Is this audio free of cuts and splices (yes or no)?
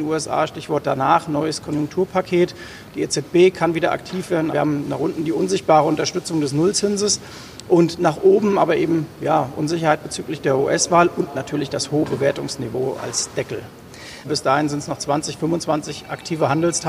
no